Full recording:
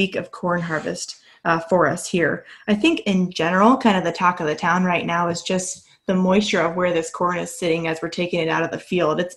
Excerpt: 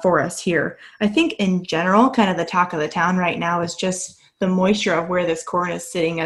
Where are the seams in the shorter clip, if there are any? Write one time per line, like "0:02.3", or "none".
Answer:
none

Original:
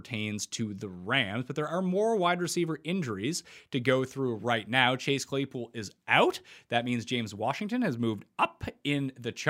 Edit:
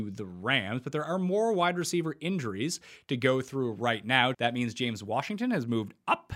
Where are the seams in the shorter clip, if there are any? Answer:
0:04.3

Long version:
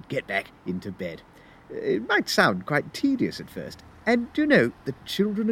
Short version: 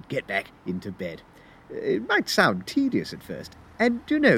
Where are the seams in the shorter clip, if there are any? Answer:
0:02.6

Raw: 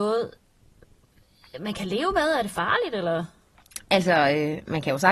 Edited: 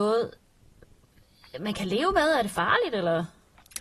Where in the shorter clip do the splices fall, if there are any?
none

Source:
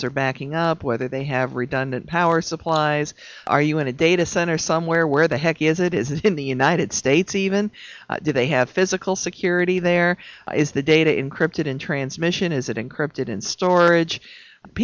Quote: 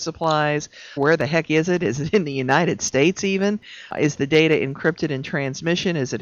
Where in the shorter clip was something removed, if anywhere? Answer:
0:01.0
0:03.9

